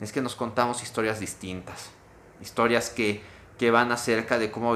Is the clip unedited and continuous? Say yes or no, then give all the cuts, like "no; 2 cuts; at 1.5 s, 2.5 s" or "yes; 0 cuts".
yes; 0 cuts